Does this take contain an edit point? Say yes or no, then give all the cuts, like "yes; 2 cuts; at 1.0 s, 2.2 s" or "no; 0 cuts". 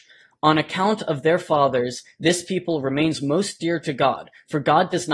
no; 0 cuts